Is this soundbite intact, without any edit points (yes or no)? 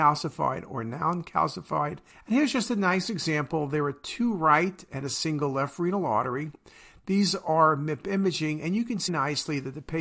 no